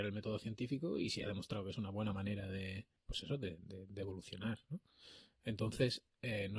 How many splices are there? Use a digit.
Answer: 1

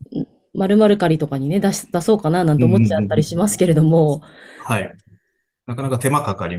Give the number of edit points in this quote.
0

